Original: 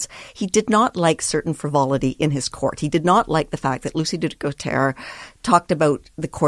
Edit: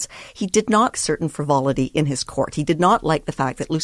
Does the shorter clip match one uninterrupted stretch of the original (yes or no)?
no